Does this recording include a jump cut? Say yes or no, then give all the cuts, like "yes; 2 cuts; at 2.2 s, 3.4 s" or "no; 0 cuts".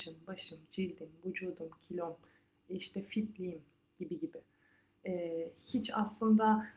no; 0 cuts